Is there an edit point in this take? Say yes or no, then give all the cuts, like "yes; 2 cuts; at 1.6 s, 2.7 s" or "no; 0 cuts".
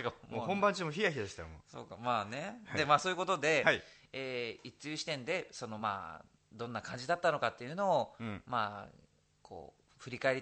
no; 0 cuts